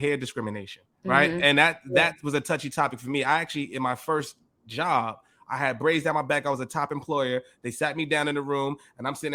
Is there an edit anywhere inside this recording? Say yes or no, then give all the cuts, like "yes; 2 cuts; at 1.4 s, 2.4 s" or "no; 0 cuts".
yes; 1 cut; at 0.9 s